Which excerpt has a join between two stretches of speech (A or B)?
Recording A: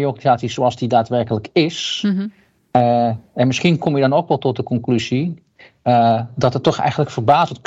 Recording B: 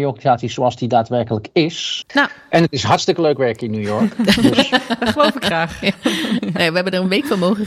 B